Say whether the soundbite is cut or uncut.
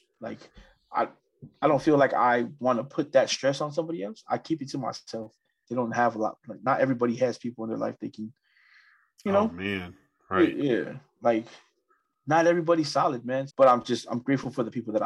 cut